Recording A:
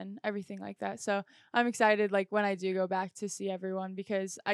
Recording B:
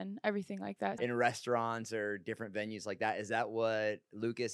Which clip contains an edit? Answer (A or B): B